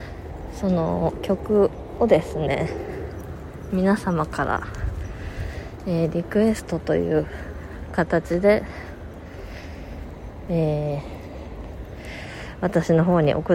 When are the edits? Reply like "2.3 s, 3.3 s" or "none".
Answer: none

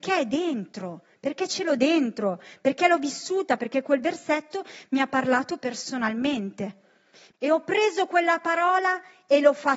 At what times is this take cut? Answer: 3.6 s, 7.3 s

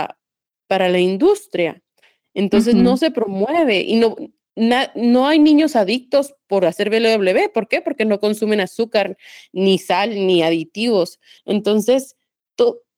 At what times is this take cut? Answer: 11.4 s

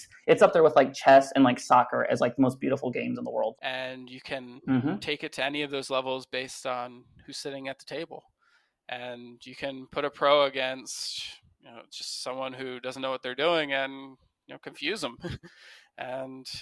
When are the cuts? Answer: 3.6 s

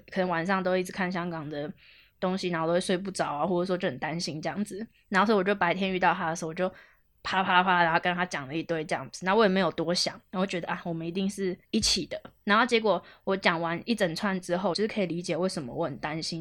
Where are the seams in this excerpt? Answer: 11.6 s, 14.7 s

